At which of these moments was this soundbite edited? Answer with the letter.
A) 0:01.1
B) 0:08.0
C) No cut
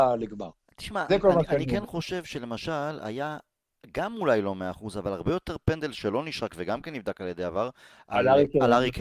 A